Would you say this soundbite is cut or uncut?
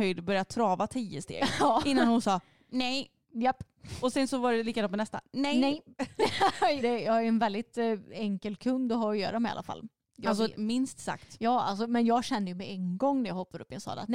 cut